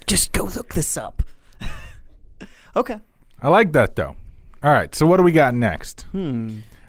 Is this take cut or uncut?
uncut